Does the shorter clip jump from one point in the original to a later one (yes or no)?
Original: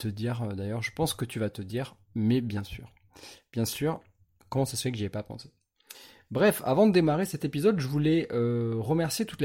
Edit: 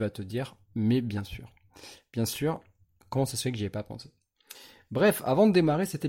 no